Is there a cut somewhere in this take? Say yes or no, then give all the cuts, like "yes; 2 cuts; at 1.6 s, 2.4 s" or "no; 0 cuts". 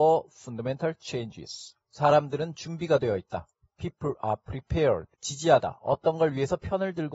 yes; 2 cuts; at 1.8 s, 5.1 s